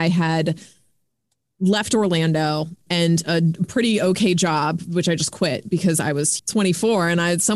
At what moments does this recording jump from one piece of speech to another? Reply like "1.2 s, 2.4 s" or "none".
2.9 s, 6.4 s